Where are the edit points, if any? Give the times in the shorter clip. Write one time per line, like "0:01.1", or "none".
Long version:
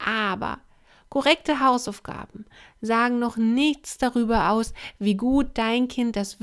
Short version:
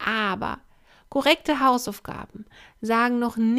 none